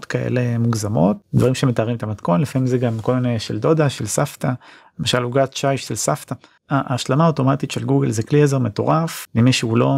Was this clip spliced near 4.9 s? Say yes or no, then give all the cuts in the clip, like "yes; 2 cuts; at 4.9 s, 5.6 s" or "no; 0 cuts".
no; 1 cut; at 6.6 s